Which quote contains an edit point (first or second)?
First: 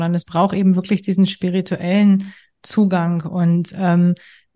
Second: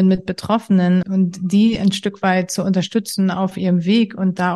second